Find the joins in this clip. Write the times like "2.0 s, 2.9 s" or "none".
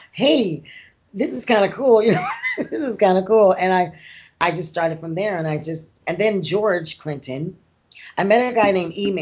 none